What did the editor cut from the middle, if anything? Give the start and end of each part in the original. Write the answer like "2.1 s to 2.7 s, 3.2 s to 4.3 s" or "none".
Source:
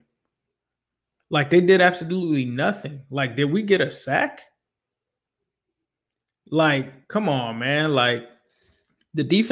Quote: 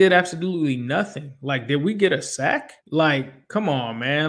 4.5 s to 6.4 s